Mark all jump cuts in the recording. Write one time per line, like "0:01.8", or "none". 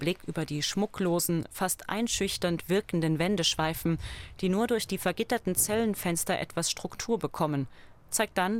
none